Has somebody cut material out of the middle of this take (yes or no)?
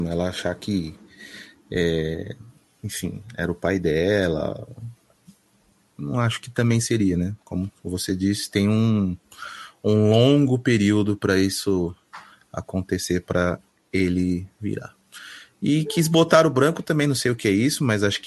no